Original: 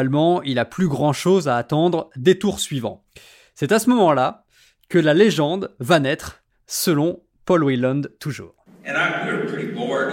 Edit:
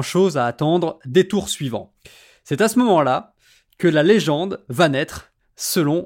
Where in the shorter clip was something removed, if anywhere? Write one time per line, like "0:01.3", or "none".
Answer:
none

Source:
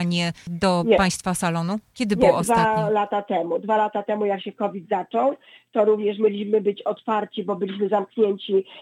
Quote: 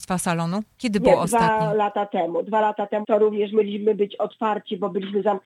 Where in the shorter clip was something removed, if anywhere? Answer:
0:03.0

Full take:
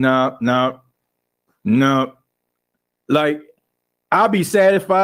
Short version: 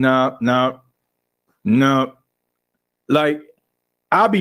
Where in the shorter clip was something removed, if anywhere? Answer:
none

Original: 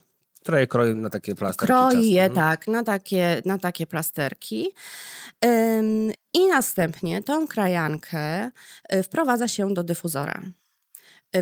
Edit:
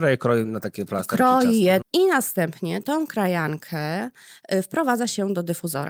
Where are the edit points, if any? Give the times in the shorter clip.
0:01.8

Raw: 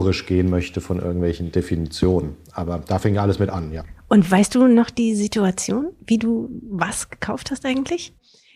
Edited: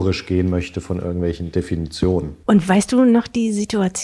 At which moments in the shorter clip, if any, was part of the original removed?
0:02.4

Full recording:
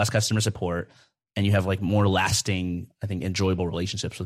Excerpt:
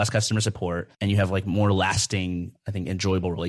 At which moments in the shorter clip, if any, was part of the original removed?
0:00.9

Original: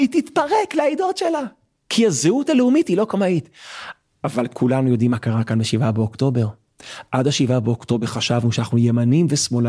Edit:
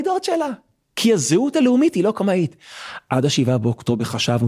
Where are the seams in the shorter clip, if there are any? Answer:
0:03.1

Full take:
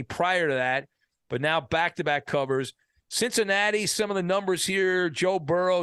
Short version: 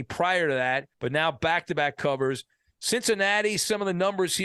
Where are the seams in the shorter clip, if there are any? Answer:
0:00.9

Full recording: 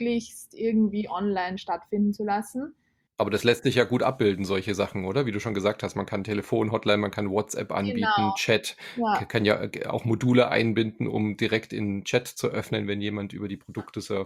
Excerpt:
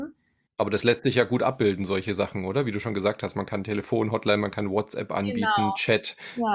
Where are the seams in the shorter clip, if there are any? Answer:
none

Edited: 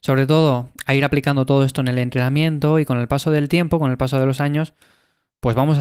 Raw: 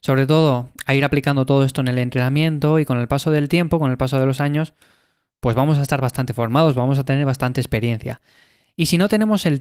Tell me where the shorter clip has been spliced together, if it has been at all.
none

